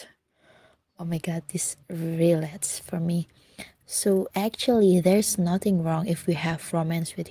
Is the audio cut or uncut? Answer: cut